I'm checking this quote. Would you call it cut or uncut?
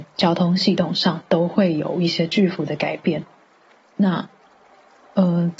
cut